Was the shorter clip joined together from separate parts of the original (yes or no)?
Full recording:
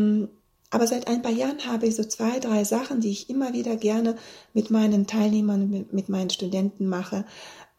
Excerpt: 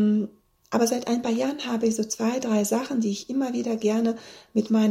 no